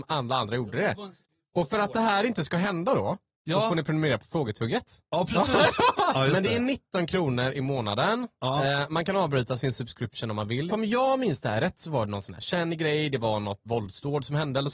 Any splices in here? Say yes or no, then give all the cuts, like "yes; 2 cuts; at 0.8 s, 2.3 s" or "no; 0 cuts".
yes; 3 cuts; at 6.1 s, 10.7 s, 13.7 s